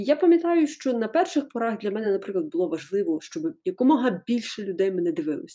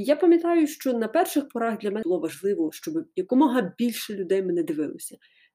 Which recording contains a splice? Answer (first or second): second